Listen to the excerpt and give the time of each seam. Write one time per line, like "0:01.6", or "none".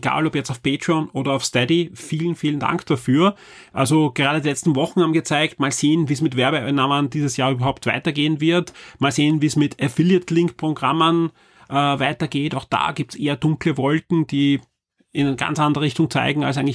none